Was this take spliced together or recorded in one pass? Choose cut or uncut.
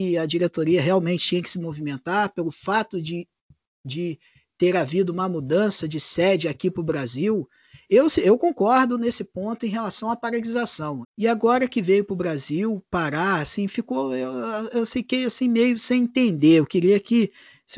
cut